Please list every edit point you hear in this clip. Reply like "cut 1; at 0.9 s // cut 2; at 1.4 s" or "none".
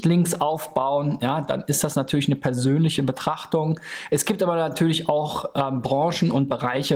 none